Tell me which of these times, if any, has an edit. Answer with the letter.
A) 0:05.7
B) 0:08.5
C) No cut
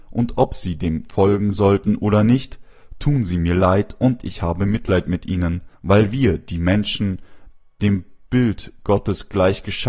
A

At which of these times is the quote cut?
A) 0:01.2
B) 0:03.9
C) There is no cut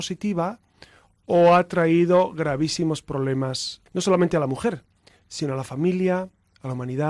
B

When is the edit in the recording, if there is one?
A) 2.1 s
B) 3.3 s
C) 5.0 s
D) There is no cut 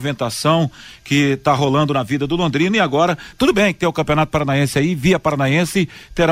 B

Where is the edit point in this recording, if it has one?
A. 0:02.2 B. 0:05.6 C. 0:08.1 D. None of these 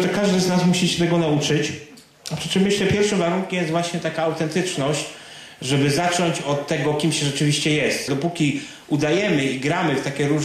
C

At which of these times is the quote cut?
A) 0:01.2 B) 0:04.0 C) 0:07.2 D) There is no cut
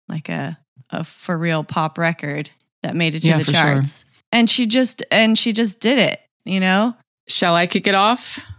C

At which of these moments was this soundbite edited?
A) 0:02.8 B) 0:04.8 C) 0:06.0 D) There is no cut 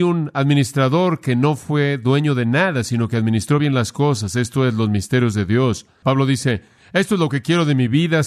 C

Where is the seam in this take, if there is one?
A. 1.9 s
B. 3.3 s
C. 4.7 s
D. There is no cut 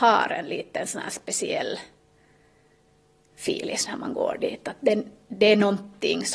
D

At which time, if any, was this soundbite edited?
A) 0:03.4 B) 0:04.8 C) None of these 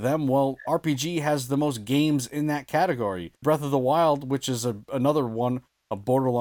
A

